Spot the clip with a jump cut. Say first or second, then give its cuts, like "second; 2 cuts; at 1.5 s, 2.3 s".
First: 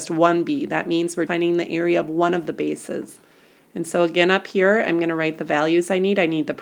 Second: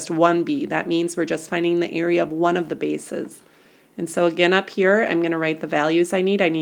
first; 1 cut; at 1.3 s